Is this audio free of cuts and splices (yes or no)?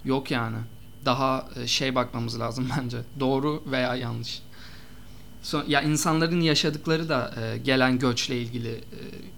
yes